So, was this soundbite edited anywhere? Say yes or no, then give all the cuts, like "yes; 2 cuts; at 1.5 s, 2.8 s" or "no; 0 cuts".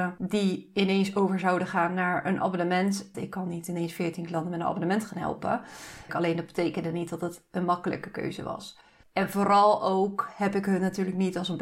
yes; 3 cuts; at 3.1 s, 6.1 s, 9.0 s